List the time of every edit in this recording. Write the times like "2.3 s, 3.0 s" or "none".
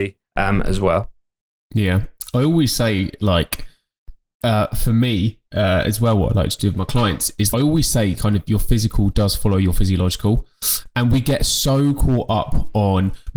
5.5 s, 7.5 s